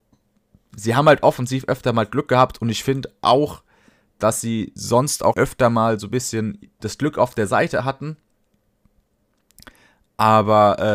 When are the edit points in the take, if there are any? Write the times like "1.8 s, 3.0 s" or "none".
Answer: 5.3 s